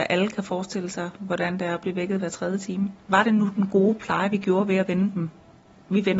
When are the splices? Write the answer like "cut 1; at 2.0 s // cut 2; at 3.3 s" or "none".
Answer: cut 1; at 3.1 s